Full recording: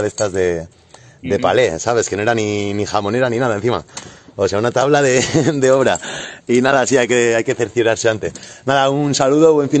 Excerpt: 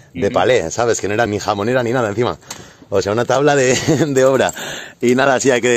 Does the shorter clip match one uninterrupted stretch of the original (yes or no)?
no